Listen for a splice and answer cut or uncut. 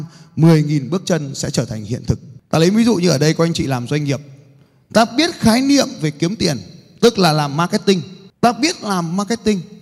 uncut